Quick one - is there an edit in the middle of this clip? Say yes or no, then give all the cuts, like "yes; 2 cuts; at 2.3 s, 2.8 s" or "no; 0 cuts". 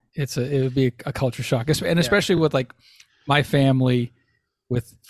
no; 0 cuts